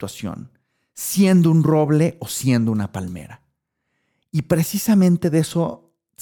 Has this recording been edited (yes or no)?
no